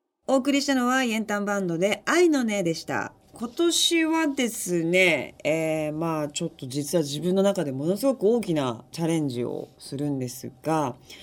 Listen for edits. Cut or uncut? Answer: cut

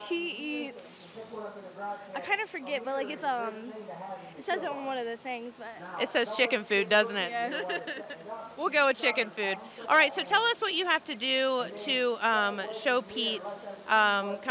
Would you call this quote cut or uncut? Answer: uncut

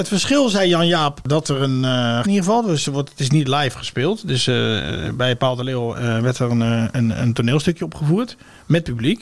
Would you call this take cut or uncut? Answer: cut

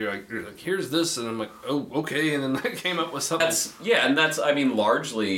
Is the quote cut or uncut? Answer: cut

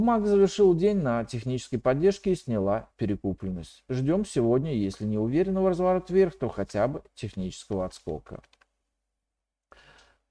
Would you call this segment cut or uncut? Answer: uncut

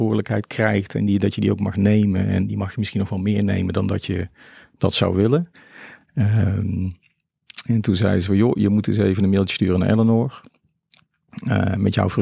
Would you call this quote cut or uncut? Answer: uncut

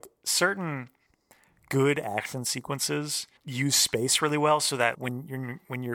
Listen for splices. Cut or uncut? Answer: cut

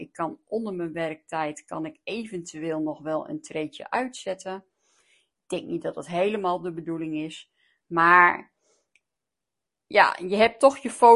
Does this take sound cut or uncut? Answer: uncut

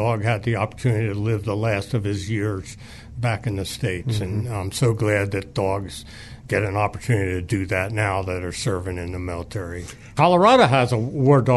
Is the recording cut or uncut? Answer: uncut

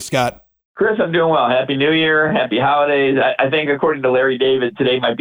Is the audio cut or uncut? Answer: uncut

